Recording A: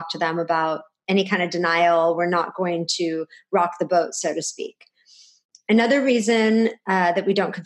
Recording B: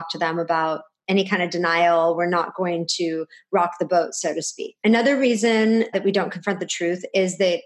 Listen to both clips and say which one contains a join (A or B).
B